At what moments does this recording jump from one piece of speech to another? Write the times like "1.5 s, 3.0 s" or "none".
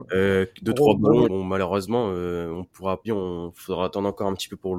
1.2 s, 3.0 s